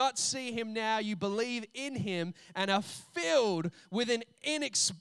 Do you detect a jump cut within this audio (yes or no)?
no